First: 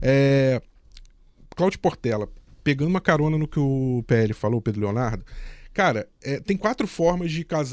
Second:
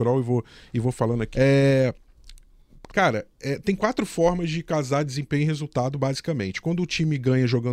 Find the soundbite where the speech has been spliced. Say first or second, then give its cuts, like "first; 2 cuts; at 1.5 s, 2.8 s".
second; 2 cuts; at 1.3 s, 2.9 s